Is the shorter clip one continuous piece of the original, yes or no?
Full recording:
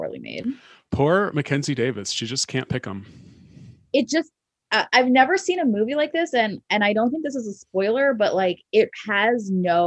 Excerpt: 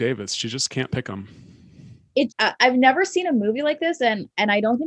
no